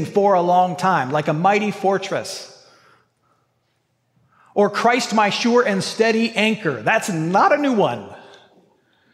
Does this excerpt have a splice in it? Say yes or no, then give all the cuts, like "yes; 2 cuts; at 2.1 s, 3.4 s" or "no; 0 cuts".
no; 0 cuts